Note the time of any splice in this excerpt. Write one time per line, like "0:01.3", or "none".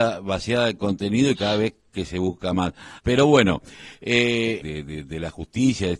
0:03.0
0:04.6